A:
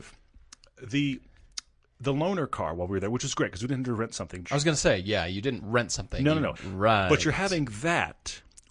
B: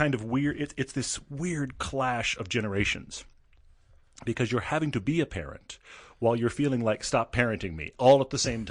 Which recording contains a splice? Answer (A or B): A